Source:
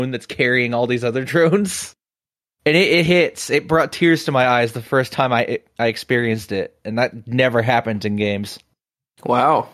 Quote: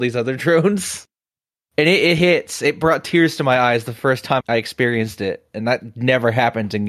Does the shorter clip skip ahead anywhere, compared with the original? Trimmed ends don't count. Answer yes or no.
yes